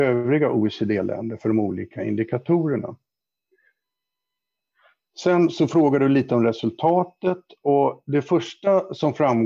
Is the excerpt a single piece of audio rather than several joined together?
yes; 0 cuts

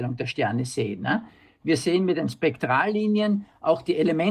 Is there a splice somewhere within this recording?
no; 0 cuts

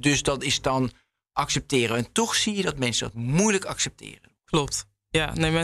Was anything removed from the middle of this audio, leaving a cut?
no; 0 cuts

